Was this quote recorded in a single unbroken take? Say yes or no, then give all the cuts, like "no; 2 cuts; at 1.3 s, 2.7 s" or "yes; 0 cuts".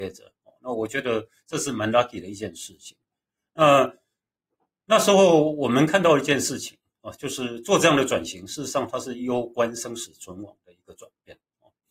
yes; 0 cuts